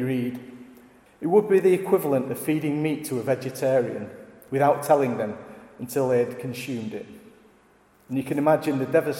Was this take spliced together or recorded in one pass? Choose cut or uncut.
cut